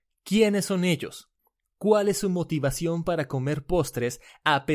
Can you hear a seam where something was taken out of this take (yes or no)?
no